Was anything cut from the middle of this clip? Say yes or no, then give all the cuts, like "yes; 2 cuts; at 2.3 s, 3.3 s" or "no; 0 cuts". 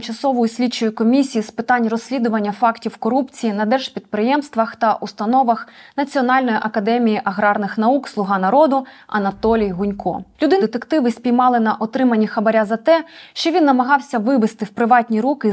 yes; 1 cut; at 10.6 s